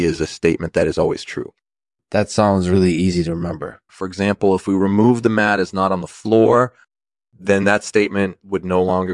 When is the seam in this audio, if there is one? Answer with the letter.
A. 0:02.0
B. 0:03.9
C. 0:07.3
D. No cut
B